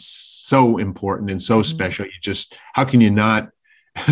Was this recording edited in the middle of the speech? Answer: no; 0 cuts

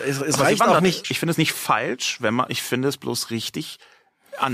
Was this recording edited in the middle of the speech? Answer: yes; 1 cut; at 1.0 s

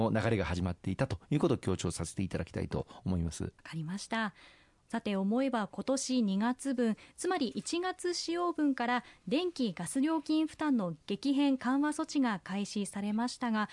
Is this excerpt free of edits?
no; 1 cut; at 3.6 s

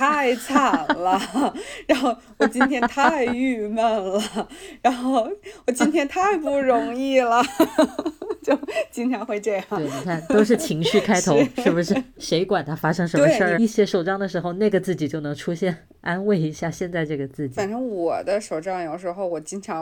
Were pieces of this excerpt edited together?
yes; 1 cut; at 13.5 s

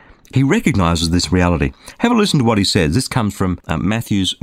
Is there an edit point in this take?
no; 0 cuts

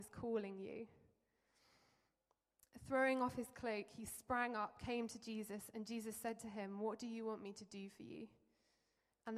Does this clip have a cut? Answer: no; 0 cuts

